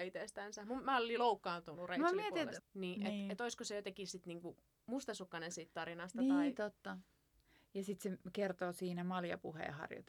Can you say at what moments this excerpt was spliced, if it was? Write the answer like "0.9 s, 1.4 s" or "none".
2.6 s